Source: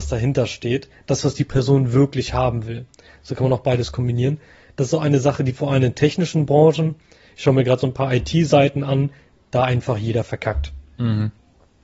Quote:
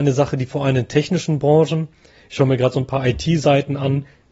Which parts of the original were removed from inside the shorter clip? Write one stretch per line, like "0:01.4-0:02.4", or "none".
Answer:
none